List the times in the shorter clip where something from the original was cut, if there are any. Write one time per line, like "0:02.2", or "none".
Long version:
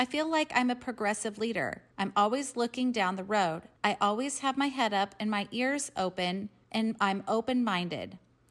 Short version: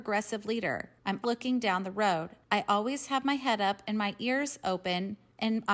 0:01.2